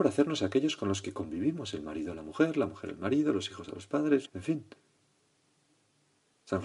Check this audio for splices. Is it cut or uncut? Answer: cut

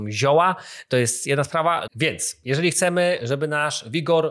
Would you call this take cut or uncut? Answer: cut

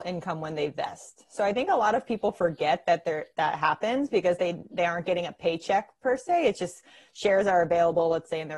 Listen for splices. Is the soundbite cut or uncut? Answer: uncut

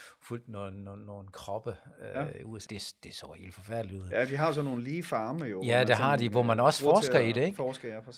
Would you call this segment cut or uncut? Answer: cut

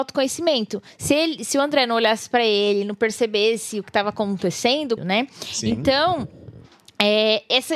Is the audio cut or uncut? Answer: cut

